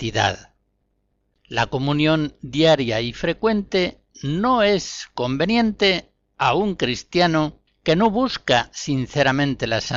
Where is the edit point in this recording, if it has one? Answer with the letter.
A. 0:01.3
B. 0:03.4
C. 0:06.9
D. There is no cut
A